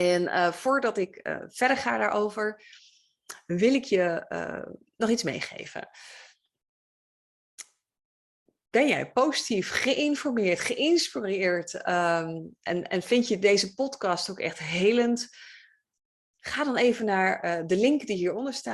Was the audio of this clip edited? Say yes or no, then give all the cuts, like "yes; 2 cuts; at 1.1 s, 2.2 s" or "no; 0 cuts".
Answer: no; 0 cuts